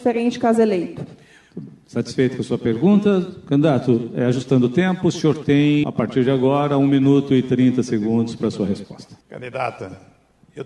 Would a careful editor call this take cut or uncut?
cut